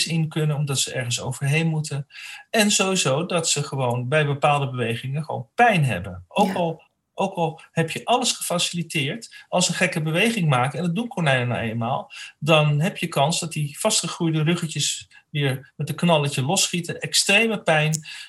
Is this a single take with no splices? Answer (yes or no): yes